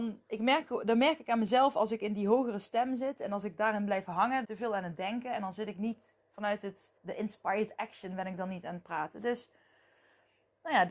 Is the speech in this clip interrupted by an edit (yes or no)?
yes